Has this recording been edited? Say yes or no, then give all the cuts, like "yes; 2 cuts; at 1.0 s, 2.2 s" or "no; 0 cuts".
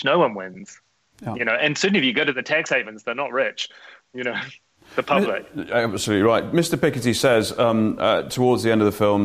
no; 0 cuts